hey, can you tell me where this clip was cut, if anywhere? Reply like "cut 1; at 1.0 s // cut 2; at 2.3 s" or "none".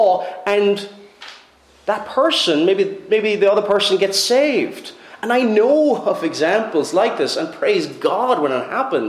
none